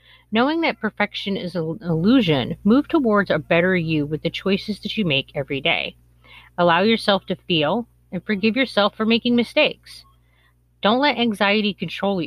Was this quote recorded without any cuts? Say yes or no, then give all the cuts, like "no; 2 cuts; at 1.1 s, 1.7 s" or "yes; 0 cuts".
yes; 0 cuts